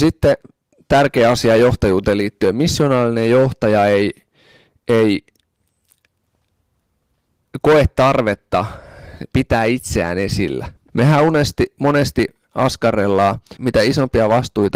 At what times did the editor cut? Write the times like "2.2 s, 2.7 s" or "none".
10.9 s, 13.6 s